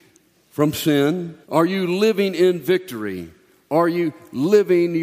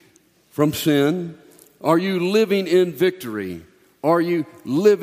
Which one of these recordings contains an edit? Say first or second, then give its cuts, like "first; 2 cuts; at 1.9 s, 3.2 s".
first; 1 cut; at 1.4 s